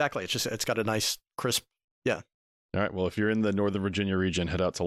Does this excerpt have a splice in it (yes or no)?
no